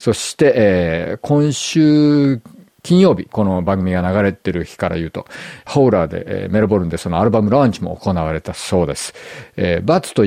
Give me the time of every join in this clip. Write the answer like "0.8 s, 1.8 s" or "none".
3.3 s, 5.7 s